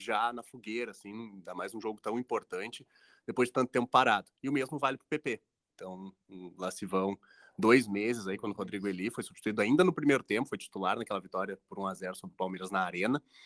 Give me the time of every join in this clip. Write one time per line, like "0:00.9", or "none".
0:05.7